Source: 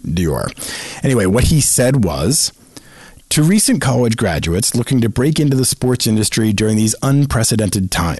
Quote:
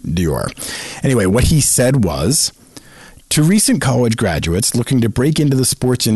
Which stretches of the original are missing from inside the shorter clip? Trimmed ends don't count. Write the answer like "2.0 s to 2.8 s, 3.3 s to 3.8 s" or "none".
none